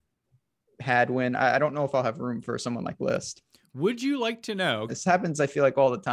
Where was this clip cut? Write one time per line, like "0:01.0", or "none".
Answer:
0:04.9